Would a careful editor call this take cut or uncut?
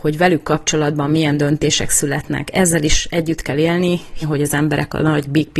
cut